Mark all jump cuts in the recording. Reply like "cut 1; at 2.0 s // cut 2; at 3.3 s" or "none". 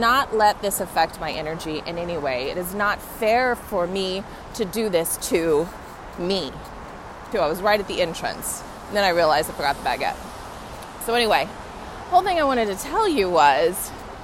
cut 1; at 7.3 s